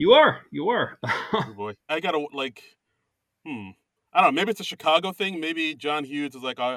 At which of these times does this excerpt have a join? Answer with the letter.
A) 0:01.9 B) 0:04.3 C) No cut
A